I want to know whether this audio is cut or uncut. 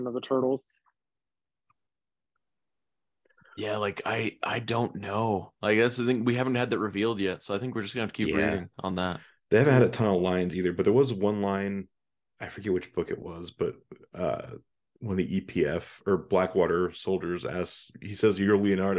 uncut